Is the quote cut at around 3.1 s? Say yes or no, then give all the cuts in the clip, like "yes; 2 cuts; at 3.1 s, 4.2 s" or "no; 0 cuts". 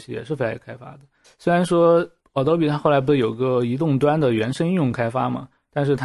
no; 1 cut; at 1.2 s